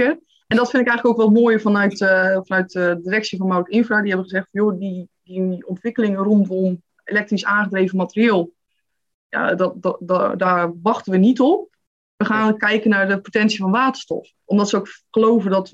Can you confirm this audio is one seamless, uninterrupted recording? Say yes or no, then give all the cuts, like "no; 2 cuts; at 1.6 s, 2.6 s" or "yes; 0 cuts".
yes; 0 cuts